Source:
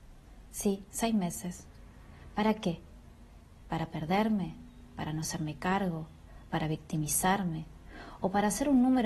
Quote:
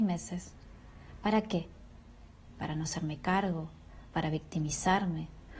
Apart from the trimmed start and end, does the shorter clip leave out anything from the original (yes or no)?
yes